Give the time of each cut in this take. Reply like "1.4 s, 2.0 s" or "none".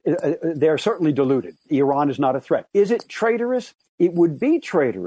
1.7 s, 2.7 s